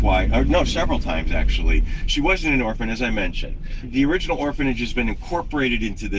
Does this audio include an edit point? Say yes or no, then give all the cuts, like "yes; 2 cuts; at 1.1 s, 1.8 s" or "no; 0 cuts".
no; 0 cuts